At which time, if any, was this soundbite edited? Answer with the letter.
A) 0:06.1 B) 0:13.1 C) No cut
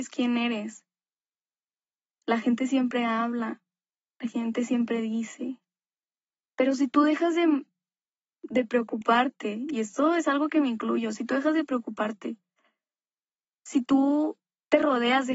C